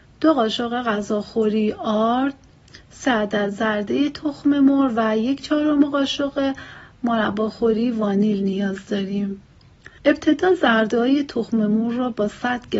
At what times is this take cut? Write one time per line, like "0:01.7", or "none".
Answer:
0:10.0